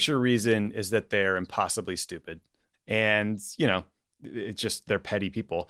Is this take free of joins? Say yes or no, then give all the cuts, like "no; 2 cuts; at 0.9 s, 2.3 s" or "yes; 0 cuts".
no; 1 cut; at 2.7 s